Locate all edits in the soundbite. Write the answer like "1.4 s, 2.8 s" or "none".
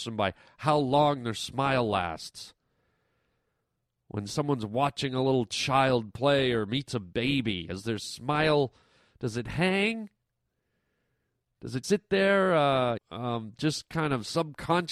11.8 s, 13.0 s